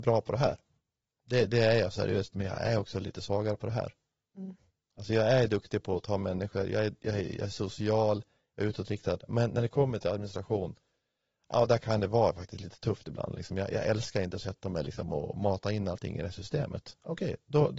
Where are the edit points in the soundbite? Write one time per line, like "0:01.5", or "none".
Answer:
0:02.3